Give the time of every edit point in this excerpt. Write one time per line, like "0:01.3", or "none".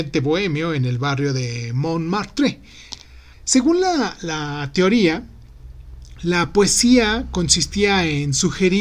0:03.3